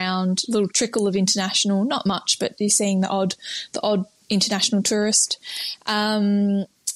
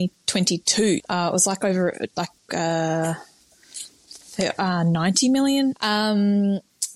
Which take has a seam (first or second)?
second